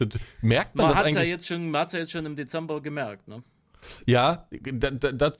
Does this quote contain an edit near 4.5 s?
no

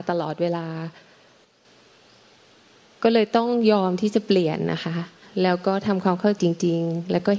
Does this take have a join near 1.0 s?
no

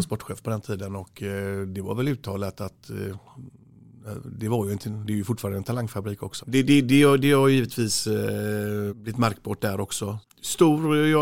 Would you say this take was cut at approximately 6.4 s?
yes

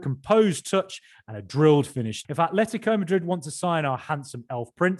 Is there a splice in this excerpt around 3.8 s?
no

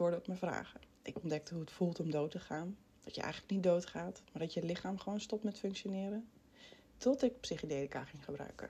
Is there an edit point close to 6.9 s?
yes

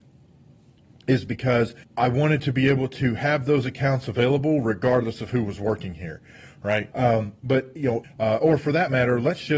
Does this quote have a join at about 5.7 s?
no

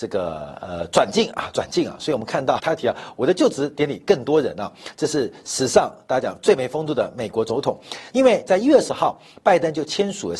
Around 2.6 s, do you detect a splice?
yes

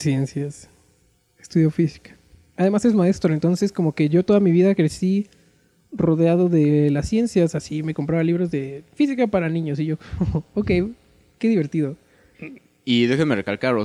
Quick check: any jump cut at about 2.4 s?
no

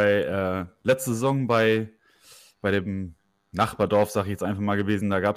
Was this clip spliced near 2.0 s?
no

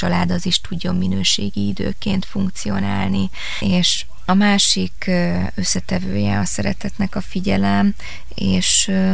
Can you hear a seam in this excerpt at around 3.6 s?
yes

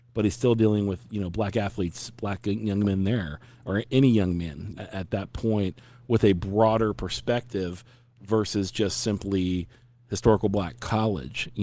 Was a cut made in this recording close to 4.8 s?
yes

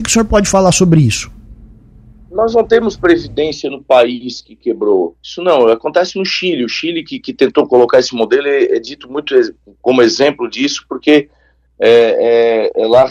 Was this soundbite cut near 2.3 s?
no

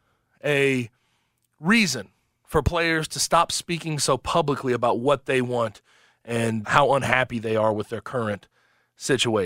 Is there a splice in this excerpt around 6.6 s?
yes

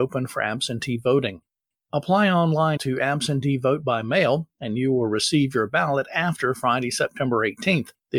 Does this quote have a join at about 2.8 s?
yes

